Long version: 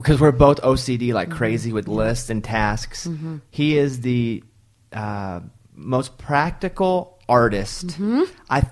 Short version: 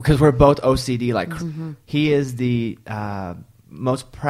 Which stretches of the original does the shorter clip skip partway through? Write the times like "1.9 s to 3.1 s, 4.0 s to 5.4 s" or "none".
1.4 s to 3.0 s, 4.5 s to 4.9 s